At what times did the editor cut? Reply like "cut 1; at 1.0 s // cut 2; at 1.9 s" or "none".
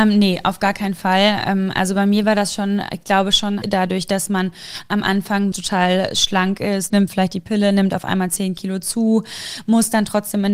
cut 1; at 3.6 s // cut 2; at 5.5 s // cut 3; at 6.9 s